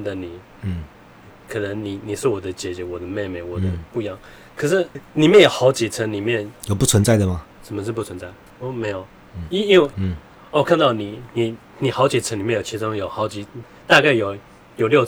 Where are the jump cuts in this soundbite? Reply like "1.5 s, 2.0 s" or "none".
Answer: 8.5 s, 9.9 s